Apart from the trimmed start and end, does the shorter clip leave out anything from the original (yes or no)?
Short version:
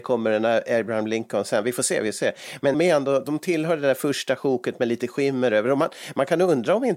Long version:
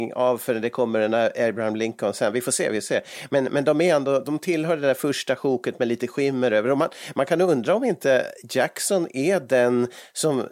yes